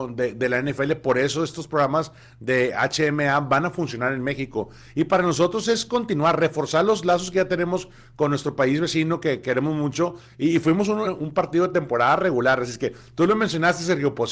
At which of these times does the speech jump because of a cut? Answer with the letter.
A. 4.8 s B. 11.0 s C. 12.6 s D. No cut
B